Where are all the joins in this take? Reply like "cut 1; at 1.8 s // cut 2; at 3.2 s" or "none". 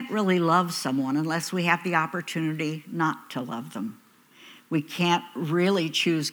none